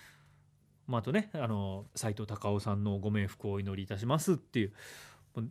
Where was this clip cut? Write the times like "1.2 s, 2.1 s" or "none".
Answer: 1.9 s